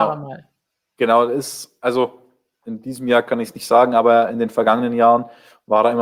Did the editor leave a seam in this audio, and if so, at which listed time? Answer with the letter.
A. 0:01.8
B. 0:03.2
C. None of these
C